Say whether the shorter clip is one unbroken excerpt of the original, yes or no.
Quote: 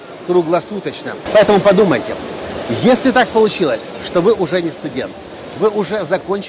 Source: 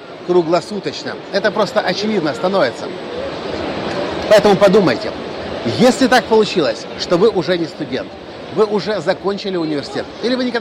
no